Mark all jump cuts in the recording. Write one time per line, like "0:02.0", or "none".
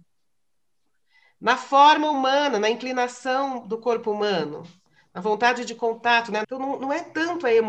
0:06.4